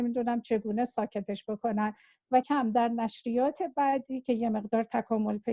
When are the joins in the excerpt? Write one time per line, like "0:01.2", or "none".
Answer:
0:02.4